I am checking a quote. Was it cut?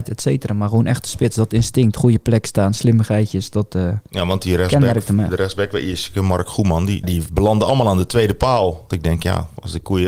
yes; 2 cuts; at 7.0 s, 8.9 s

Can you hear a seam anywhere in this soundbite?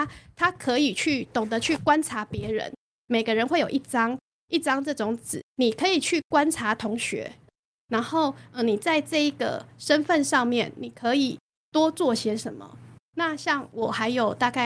yes; 2 cuts; at 7.5 s, 13.0 s

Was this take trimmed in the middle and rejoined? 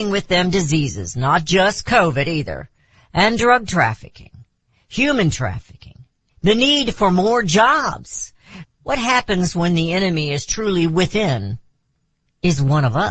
yes; 2 cuts; at 6.3 s, 8.6 s

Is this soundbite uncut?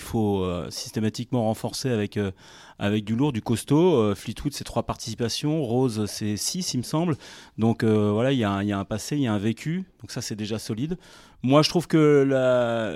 yes; 0 cuts

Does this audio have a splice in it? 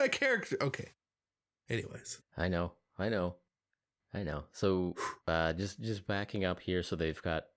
no; 0 cuts

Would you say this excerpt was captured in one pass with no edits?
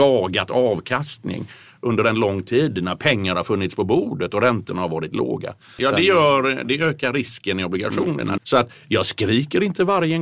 no; 2 cuts; at 5.8 s, 8.4 s

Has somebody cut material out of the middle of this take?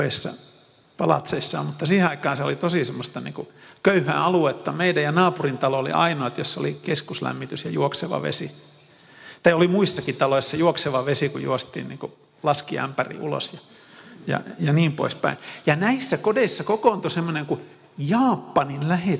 no; 0 cuts

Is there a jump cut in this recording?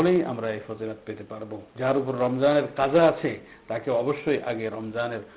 yes; 1 cut; at 1.7 s

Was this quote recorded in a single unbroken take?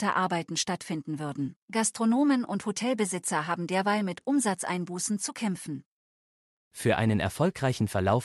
no; 2 cuts; at 1.6 s, 6.5 s

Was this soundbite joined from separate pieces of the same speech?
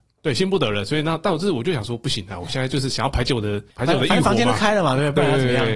no; 0 cuts

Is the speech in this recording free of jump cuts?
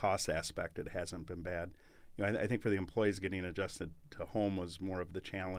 yes; 0 cuts

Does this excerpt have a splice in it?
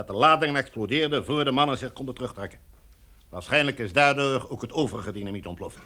no; 0 cuts

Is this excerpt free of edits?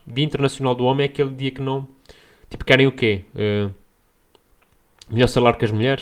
yes; 0 cuts

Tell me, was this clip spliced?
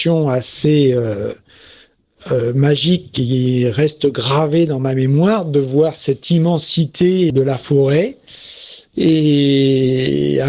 yes; 1 cut; at 7.3 s

